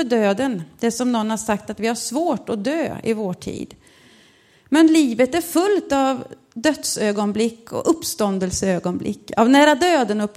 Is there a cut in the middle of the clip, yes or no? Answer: no